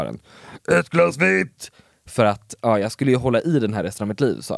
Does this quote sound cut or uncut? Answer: uncut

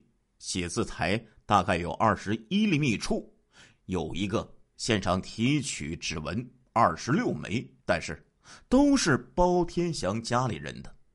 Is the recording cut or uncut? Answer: cut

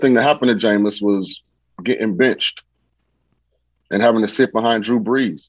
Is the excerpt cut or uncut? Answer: uncut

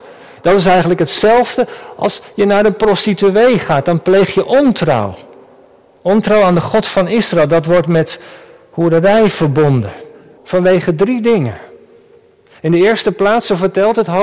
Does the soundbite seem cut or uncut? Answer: cut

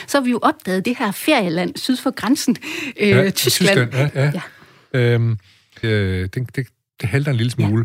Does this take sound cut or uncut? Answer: cut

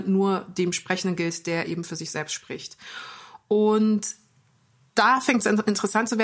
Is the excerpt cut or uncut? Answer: uncut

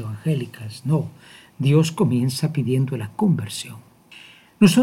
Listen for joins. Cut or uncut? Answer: uncut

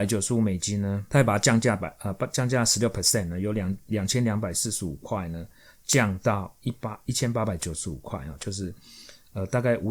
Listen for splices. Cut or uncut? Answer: uncut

